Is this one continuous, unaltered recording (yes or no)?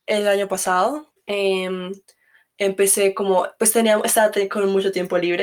no